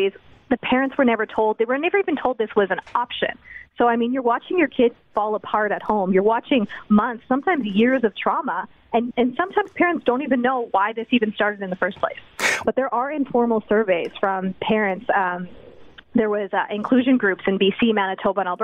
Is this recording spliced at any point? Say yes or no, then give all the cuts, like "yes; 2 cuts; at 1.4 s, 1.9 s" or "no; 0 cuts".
yes; 1 cut; at 12.6 s